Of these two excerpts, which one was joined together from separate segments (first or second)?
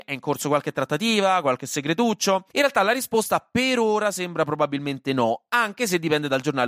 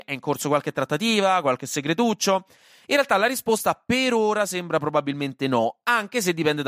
first